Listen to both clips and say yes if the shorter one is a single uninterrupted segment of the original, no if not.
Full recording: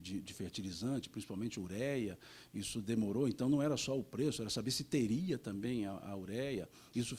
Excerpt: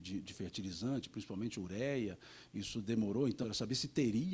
no